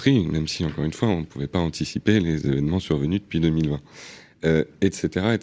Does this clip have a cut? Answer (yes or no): no